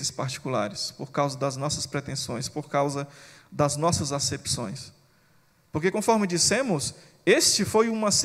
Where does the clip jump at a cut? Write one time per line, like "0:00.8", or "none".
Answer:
none

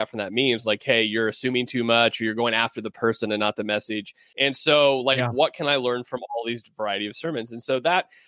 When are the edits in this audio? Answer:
0:04.3

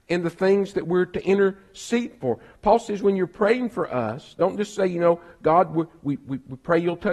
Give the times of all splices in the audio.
none

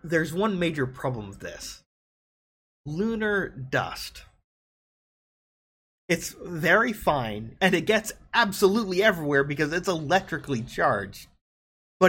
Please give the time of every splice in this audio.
0:06.0
0:07.6

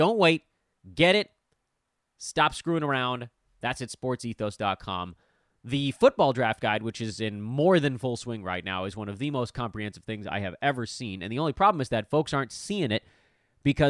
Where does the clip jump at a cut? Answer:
none

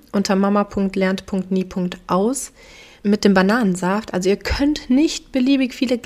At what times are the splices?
none

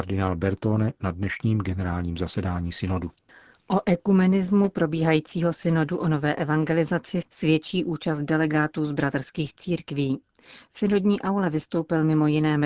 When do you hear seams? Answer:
none

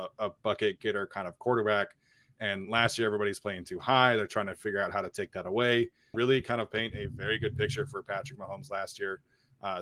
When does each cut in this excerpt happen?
0:06.1

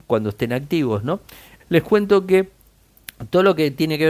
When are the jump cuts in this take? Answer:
0:01.6

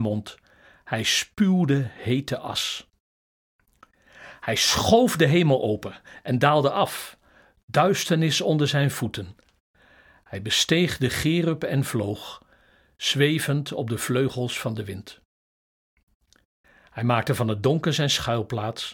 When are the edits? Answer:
none

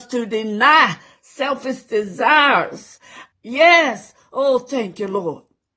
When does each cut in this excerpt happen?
0:03.3

